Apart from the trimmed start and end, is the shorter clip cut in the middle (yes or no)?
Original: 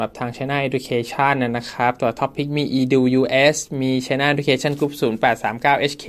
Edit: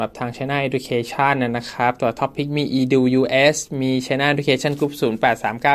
no